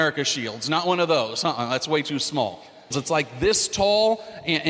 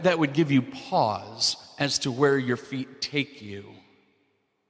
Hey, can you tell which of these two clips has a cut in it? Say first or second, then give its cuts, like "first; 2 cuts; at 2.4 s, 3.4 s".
first; 1 cut; at 2.9 s